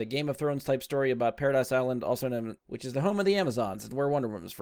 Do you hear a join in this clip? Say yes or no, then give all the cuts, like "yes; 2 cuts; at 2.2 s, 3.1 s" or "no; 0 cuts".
yes; 1 cut; at 2.6 s